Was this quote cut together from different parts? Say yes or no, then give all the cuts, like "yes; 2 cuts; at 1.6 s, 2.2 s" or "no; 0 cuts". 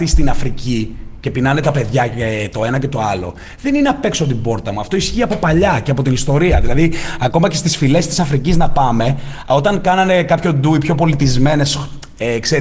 no; 0 cuts